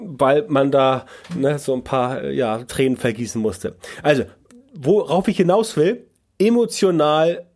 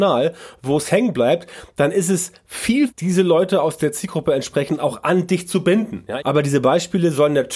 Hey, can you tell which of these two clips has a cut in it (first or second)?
second